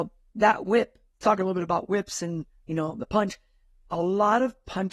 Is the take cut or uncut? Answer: uncut